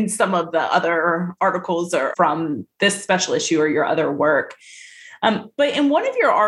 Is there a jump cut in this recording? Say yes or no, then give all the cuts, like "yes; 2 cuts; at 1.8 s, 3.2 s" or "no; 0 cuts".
yes; 1 cut; at 2.1 s